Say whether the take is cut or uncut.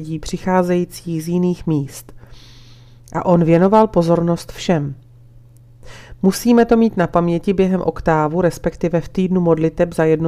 uncut